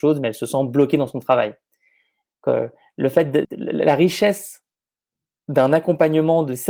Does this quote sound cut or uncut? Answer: cut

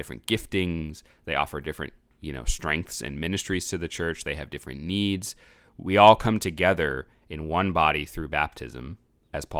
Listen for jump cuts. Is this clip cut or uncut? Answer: uncut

